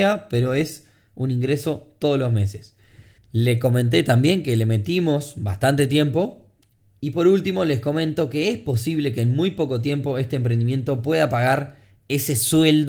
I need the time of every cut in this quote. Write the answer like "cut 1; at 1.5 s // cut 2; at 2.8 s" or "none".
cut 1; at 3.2 s